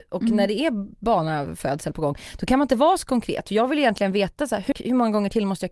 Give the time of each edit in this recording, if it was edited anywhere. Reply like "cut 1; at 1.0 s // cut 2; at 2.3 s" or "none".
cut 1; at 4.7 s